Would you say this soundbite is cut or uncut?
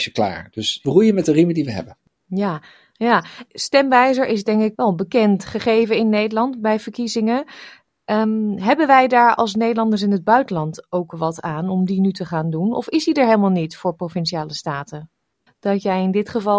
cut